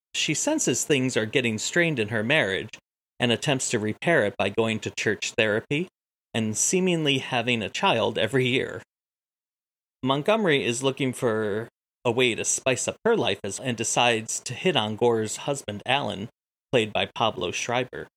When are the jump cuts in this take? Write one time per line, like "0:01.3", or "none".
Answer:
0:13.6